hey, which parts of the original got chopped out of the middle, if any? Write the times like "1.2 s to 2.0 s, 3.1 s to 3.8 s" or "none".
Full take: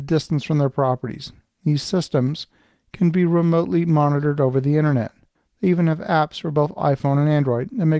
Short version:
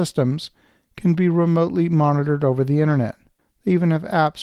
none